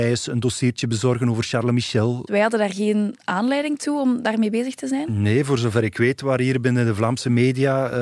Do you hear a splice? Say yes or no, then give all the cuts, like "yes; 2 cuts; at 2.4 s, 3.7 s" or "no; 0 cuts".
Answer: yes; 1 cut; at 2.3 s